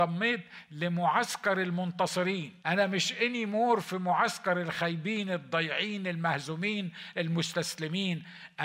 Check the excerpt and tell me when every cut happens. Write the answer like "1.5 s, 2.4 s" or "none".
2.6 s